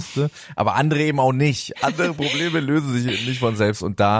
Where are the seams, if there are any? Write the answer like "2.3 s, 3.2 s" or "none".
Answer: 1.7 s

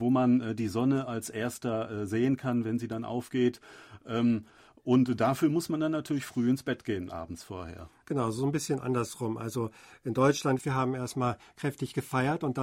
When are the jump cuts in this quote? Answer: 10.6 s

